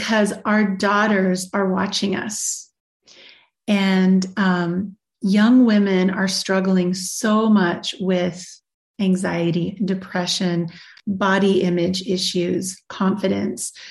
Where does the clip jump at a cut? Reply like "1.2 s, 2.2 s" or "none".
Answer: none